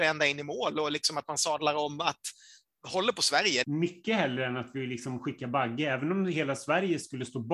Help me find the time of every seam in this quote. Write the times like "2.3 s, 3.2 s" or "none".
3.6 s